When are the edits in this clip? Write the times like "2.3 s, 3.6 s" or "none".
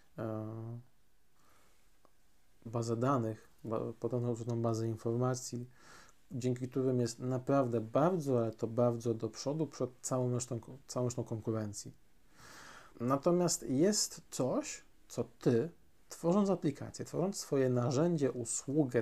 2.7 s, 12.9 s